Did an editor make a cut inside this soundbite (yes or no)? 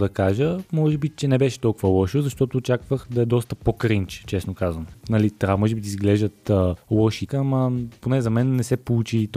yes